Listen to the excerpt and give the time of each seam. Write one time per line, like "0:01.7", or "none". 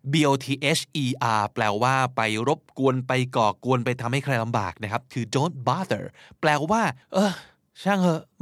0:07.0